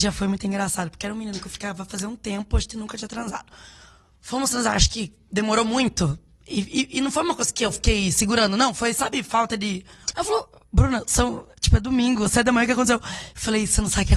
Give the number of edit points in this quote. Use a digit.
1